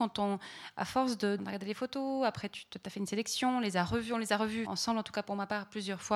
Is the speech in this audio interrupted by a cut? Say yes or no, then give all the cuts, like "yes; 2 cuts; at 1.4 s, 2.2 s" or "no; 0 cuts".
yes; 2 cuts; at 1.4 s, 4.6 s